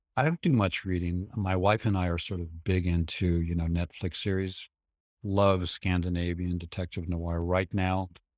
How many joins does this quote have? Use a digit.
0